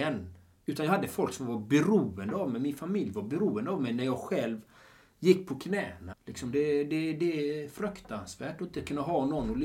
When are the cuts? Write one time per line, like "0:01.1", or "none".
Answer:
0:06.1